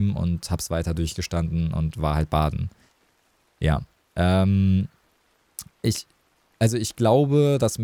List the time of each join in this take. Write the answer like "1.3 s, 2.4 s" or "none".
5.7 s